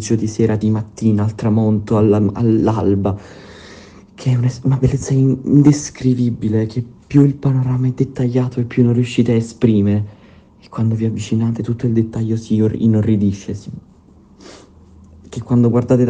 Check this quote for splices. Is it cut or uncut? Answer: uncut